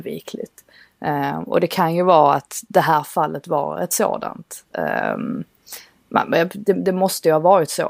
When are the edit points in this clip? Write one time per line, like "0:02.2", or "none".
none